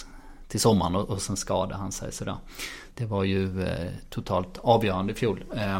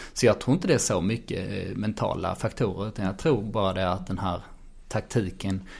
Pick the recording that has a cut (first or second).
first